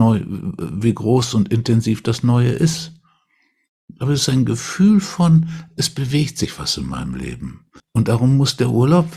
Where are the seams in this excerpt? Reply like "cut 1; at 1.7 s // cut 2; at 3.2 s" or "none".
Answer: cut 1; at 7.8 s